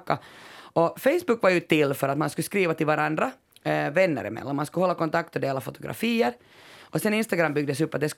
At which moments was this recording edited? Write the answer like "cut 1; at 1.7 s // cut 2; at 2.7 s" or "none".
none